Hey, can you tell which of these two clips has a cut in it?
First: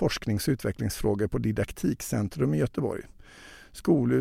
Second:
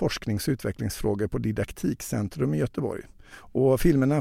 second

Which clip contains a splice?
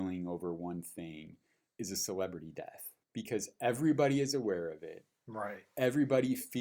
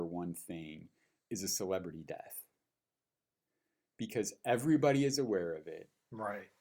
first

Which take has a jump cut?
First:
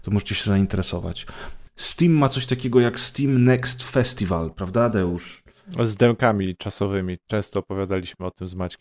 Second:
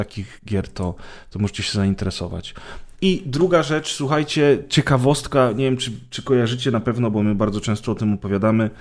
first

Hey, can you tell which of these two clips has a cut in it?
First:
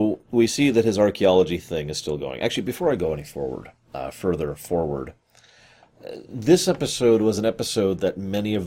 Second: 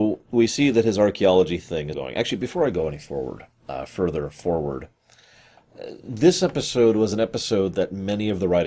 second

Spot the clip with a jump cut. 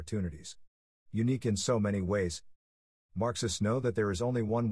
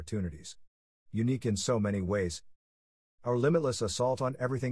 first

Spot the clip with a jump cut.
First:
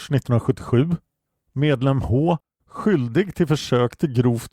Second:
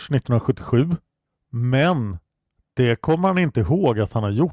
second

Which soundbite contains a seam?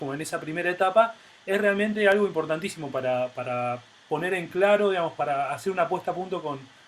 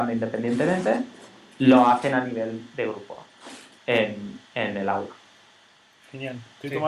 second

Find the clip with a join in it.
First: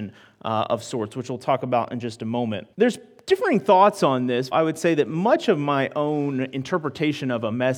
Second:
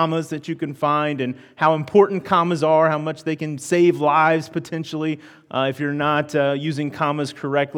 first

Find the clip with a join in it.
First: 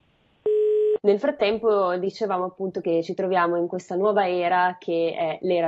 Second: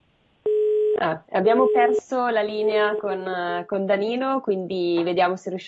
first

